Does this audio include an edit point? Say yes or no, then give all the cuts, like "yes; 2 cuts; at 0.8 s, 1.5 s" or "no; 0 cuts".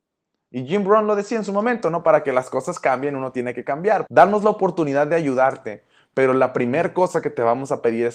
yes; 1 cut; at 4.1 s